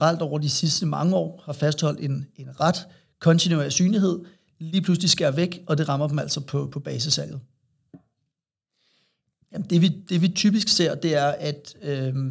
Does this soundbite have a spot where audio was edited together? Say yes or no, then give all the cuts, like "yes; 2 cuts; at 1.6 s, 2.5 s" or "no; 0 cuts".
yes; 1 cut; at 9.4 s